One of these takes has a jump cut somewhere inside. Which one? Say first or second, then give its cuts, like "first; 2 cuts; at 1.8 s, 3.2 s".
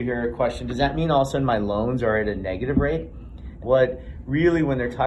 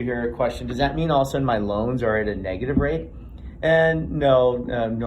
first; 1 cut; at 3.6 s